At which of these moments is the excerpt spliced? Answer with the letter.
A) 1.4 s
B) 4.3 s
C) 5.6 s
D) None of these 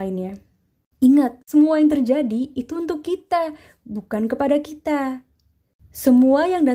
D